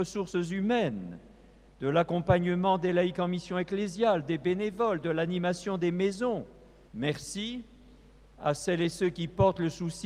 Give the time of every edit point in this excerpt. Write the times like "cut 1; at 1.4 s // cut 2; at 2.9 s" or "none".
cut 1; at 6.9 s